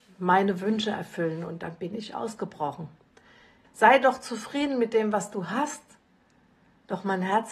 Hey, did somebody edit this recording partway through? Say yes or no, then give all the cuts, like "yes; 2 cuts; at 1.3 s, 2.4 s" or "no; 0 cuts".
yes; 1 cut; at 3.6 s